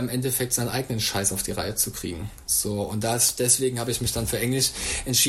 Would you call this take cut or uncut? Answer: uncut